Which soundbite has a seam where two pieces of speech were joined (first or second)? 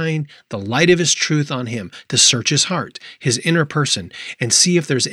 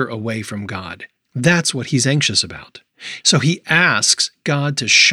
second